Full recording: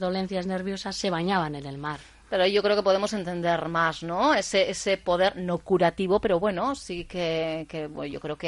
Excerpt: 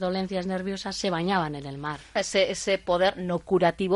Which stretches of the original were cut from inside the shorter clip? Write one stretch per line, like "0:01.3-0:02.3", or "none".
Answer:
0:02.2-0:04.3

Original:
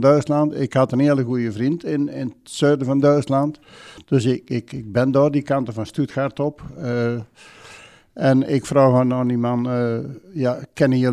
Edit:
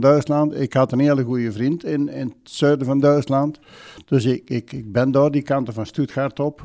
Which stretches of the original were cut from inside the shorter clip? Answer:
none

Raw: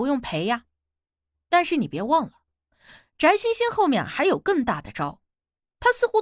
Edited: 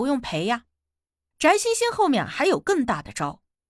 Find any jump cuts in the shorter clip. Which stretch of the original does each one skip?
0:01.3-0:03.1

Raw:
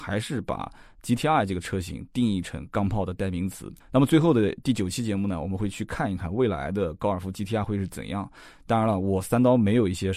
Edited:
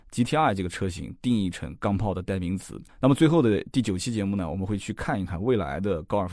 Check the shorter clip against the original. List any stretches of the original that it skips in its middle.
none

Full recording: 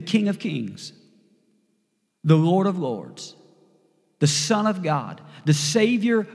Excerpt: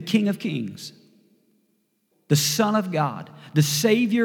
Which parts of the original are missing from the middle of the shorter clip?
0:02.1-0:04.0

